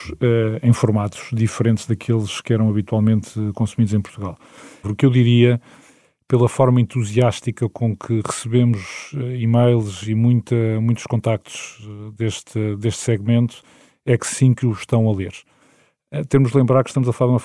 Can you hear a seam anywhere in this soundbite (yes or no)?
yes